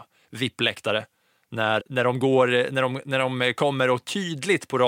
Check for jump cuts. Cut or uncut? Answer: cut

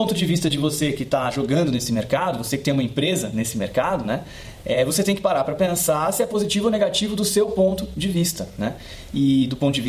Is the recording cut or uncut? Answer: uncut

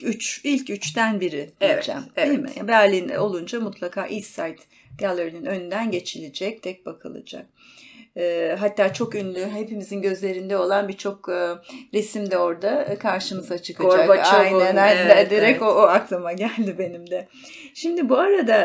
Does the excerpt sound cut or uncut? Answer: cut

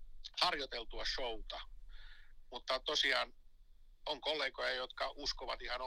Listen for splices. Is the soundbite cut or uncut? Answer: uncut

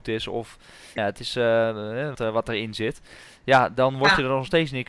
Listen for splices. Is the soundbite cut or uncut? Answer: cut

